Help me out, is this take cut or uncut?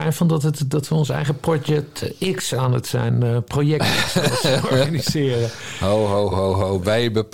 cut